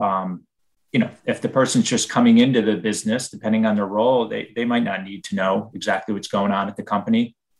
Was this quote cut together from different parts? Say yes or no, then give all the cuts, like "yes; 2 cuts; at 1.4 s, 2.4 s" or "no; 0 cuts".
no; 0 cuts